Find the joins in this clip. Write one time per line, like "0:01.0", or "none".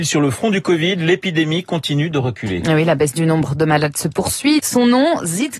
0:04.6